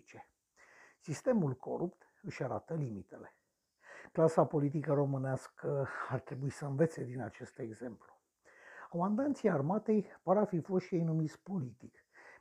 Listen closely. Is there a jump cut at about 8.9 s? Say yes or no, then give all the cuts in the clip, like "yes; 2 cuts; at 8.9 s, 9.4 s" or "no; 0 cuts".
yes; 1 cut; at 8.9 s